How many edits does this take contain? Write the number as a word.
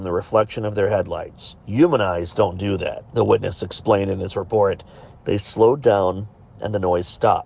three